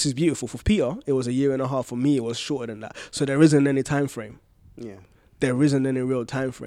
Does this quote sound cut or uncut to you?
uncut